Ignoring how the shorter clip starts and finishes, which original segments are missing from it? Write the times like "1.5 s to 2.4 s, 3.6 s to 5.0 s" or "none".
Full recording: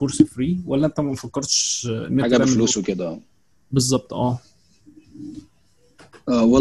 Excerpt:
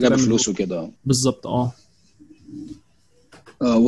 3.2 s to 3.6 s